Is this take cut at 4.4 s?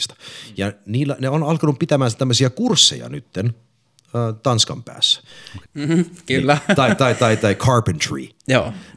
no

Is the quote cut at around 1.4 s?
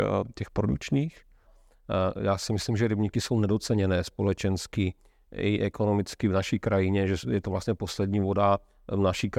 yes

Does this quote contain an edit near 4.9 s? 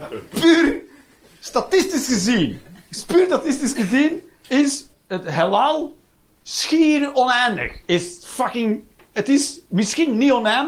yes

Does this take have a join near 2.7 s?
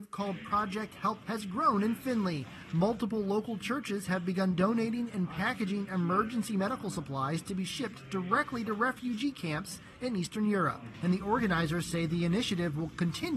no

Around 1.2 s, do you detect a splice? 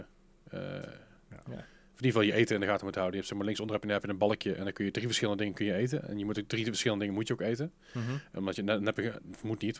no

